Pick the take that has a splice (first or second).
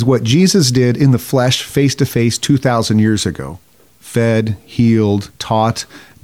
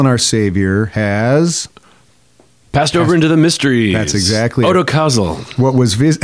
first